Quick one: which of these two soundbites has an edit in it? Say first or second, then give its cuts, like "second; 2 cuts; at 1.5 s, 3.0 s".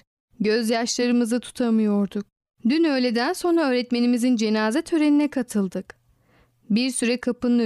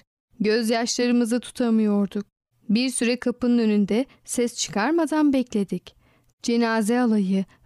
second; 2 cuts; at 2.5 s, 6.3 s